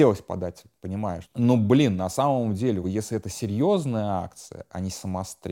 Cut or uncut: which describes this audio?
cut